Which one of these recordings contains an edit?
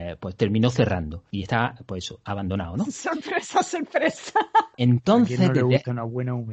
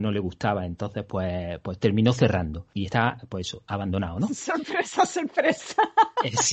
first; 1 cut; at 4.7 s

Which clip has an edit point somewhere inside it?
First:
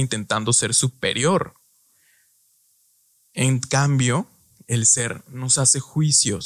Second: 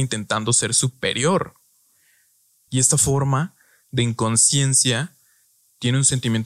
second; 1 cut; at 2.7 s

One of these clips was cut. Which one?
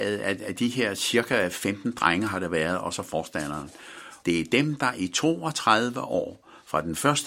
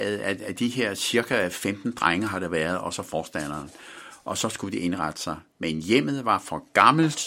first; 1 cut; at 4.2 s

